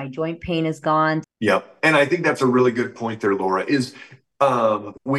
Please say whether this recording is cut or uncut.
cut